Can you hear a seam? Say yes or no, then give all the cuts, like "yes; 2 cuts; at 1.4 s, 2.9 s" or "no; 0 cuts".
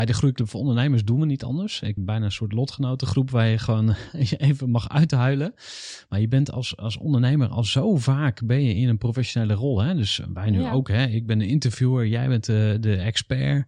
yes; 1 cut; at 2.0 s